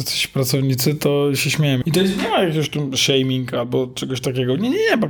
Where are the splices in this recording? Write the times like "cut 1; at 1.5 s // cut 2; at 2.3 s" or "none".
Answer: cut 1; at 1.8 s